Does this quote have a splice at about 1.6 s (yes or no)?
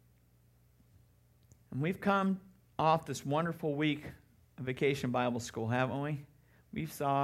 yes